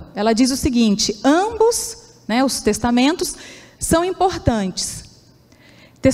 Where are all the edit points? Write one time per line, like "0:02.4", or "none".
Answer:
none

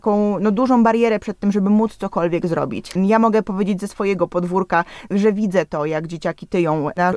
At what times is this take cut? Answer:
0:03.0
0:05.1

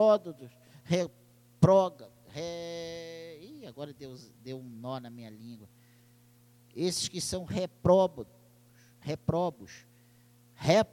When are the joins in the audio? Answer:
none

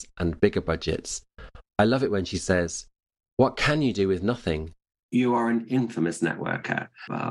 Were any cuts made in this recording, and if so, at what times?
0:05.0

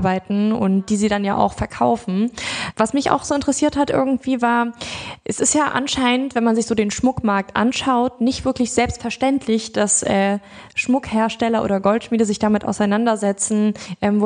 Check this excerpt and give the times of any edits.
0:02.7

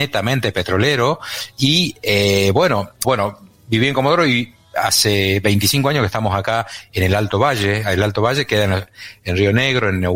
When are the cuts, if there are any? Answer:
0:03.0

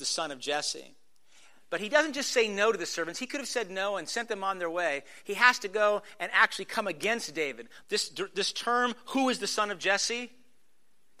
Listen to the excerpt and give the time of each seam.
0:07.8

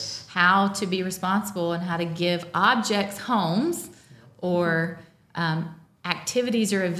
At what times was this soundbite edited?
none

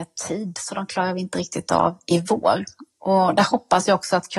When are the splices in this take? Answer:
none

